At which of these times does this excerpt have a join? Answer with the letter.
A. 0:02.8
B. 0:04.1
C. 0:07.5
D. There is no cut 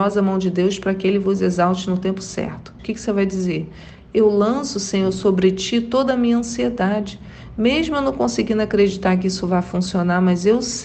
A